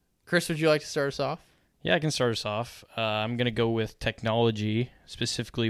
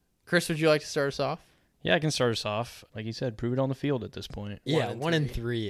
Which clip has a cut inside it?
second; 2 cuts; at 2.9 s, 4.7 s

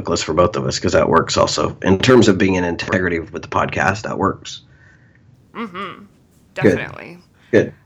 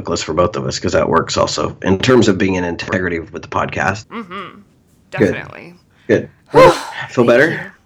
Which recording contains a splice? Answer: second; 2 cuts; at 4.0 s, 6.4 s

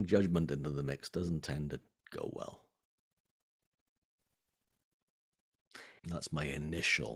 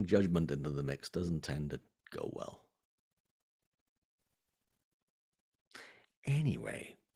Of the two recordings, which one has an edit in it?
first; 1 cut; at 6.0 s

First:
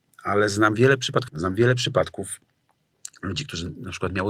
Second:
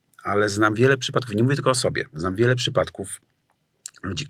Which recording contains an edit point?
first; 1 cut; at 1.3 s

